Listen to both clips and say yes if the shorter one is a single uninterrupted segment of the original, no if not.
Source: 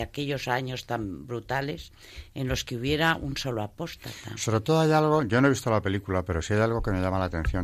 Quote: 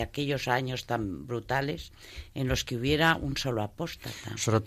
yes